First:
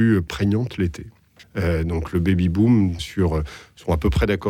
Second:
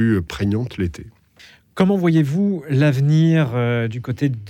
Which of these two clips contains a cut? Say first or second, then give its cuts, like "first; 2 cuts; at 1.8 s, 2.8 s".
first; 2 cuts; at 1.4 s, 3.0 s